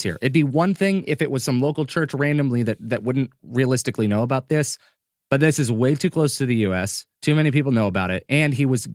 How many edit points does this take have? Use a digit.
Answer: 1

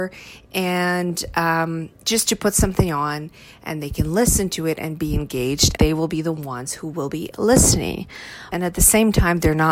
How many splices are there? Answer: 2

